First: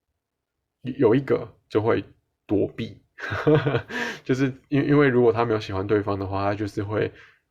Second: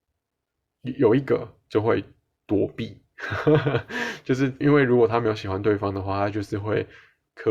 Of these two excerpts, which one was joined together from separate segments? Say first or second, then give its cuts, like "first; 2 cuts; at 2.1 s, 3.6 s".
second; 1 cut; at 4.6 s